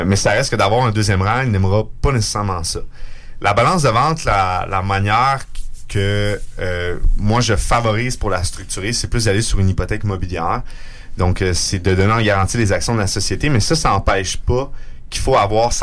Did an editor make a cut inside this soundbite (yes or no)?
no